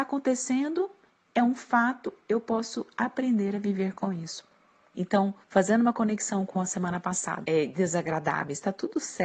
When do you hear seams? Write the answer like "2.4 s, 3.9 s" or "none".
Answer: 4.9 s, 7.4 s